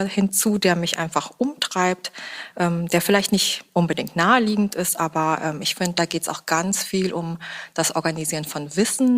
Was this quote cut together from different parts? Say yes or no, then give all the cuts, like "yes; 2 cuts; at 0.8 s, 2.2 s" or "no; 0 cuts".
no; 0 cuts